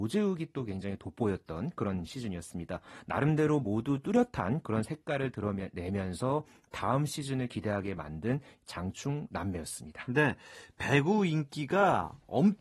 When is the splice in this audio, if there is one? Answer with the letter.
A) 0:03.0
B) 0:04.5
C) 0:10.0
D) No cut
D